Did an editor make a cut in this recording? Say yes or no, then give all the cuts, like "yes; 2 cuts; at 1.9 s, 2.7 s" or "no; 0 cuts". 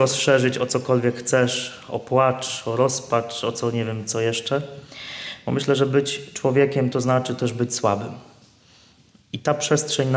no; 0 cuts